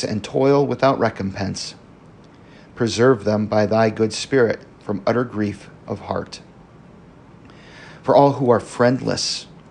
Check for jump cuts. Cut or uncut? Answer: uncut